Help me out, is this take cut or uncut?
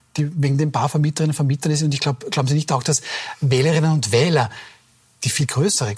uncut